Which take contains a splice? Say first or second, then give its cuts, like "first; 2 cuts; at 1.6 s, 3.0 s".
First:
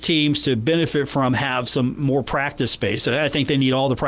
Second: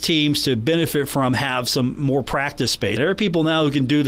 second; 1 cut; at 3.0 s